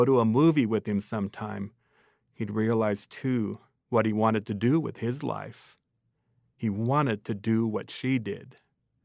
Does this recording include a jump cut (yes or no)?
no